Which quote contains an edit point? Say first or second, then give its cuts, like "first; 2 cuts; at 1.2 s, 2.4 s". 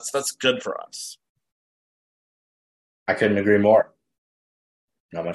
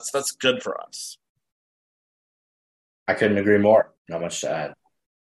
second; 1 cut; at 4.0 s